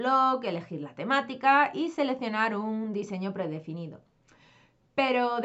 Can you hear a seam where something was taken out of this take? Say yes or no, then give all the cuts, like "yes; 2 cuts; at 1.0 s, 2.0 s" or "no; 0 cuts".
no; 0 cuts